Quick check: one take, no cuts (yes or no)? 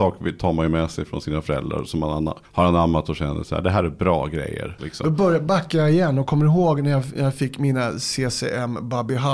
no